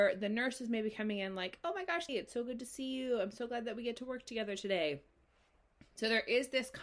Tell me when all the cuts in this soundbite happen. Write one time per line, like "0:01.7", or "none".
0:02.1